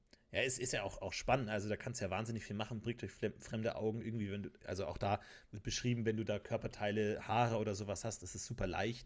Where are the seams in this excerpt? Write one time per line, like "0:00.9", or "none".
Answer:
none